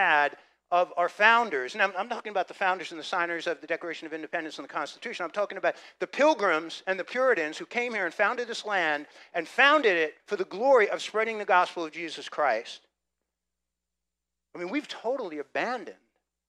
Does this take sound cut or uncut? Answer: cut